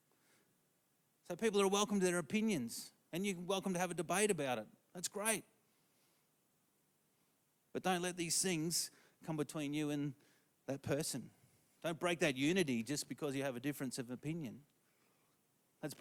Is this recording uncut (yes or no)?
yes